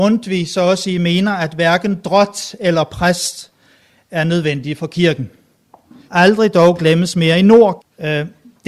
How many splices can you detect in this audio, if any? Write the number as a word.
two